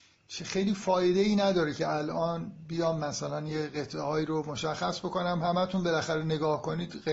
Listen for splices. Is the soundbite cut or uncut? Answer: uncut